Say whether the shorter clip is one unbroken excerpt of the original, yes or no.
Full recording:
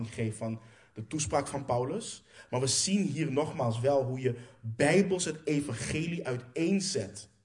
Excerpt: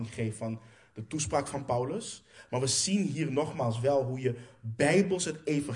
yes